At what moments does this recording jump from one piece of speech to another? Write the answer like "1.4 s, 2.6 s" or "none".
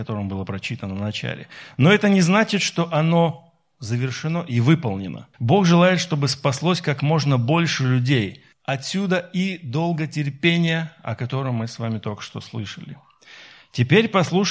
5.3 s, 8.5 s